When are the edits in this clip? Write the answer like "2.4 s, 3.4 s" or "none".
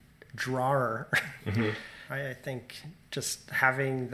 2.1 s